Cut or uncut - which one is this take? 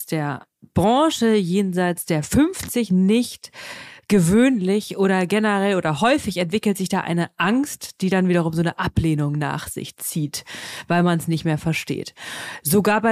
uncut